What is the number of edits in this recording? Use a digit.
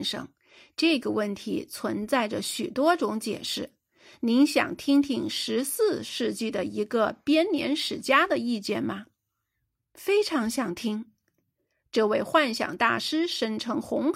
0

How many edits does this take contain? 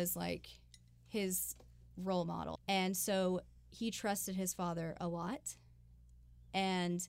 1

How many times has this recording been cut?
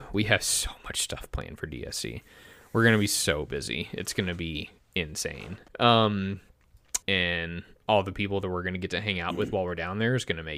2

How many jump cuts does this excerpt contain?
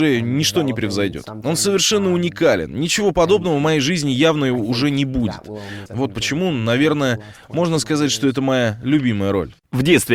1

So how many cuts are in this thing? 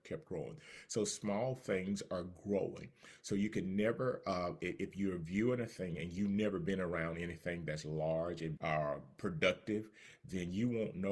1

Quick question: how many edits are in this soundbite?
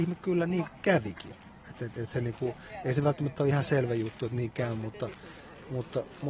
0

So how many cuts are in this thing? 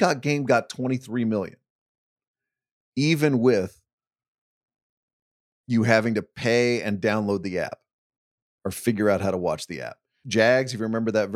1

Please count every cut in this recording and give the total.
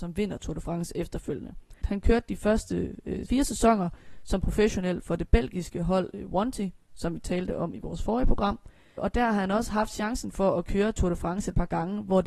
1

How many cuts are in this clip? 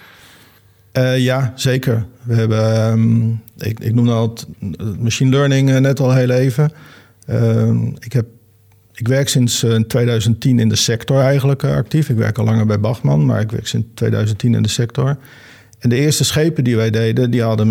0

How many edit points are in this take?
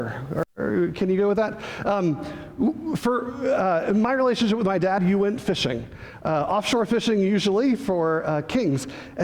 1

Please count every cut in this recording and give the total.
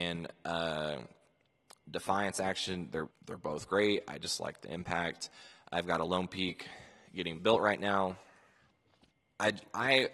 1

